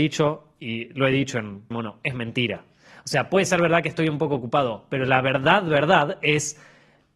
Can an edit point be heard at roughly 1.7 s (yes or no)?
yes